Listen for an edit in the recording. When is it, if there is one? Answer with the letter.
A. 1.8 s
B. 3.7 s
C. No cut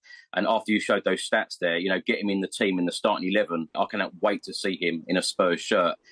B